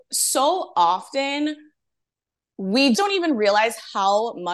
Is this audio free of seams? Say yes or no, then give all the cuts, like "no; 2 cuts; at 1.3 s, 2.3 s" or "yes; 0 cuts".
no; 1 cut; at 2.9 s